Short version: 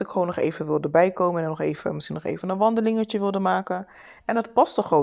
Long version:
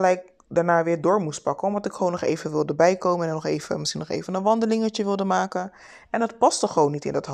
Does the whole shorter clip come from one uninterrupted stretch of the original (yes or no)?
yes